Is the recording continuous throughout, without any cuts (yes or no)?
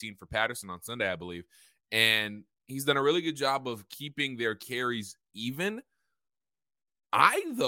yes